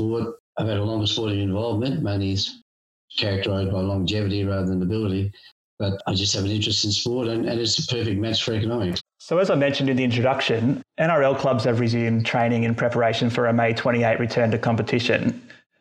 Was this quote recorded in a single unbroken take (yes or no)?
no